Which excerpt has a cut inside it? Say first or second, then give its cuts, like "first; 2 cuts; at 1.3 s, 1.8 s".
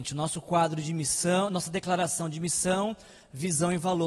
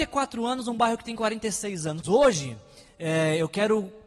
second; 1 cut; at 2.0 s